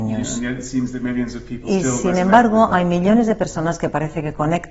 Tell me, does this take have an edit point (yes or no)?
no